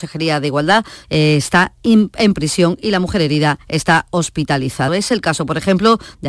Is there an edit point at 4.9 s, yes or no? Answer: yes